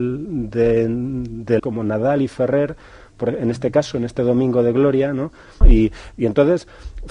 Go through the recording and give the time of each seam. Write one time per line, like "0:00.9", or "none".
0:01.6
0:05.6